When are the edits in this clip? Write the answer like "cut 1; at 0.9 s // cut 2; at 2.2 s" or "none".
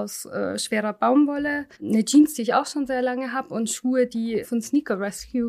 cut 1; at 1.7 s // cut 2; at 4.4 s